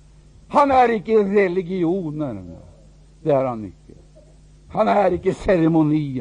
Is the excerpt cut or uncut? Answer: uncut